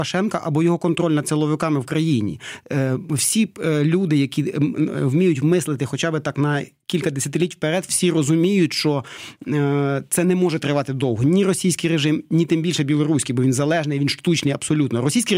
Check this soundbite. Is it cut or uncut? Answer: uncut